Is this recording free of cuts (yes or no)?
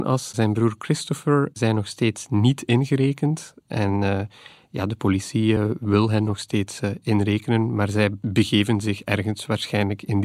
yes